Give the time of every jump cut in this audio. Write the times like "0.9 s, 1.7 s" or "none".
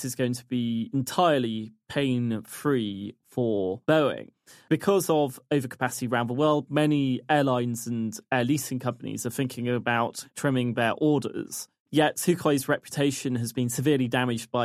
6.7 s, 11.8 s